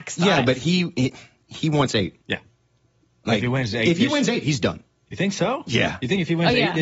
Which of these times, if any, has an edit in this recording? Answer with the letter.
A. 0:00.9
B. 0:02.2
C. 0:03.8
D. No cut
B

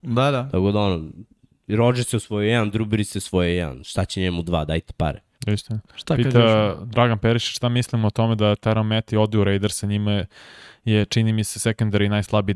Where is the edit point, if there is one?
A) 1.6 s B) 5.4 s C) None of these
B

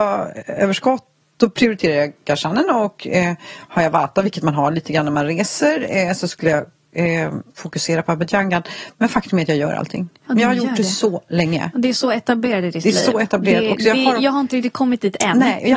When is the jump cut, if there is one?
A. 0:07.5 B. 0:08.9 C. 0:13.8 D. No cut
A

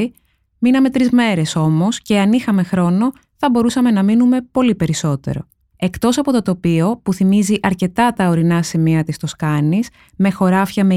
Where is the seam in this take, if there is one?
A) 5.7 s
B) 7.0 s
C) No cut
A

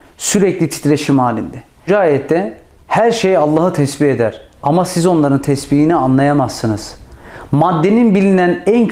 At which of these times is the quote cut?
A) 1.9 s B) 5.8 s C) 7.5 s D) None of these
A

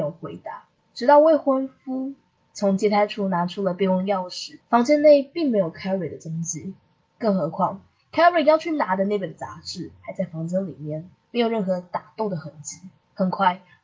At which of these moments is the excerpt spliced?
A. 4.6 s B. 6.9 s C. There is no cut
A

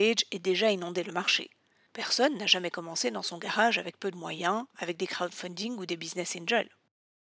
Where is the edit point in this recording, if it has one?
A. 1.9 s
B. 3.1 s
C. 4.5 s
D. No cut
A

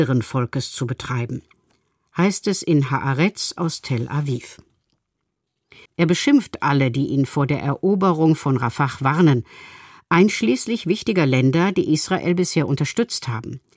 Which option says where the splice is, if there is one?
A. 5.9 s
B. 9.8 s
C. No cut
A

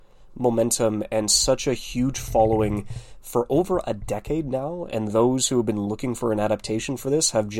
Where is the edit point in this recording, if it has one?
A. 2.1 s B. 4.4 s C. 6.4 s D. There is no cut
D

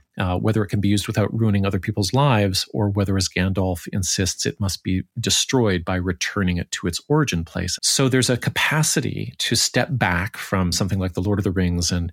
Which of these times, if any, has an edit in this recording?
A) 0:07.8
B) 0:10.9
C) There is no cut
A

